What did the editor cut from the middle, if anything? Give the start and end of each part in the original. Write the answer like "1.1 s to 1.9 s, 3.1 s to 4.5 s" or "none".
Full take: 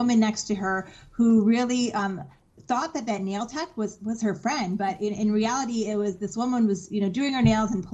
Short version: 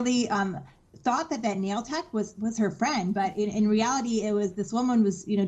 none